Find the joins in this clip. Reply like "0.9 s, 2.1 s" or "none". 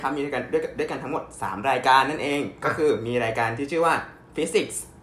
none